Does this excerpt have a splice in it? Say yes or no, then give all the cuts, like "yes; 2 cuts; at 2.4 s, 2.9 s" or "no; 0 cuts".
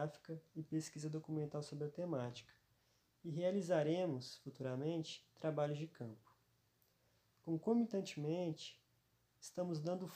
no; 0 cuts